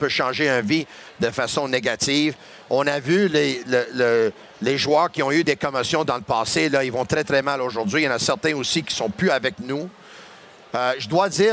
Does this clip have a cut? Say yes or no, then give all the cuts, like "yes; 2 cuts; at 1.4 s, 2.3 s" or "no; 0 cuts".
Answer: no; 0 cuts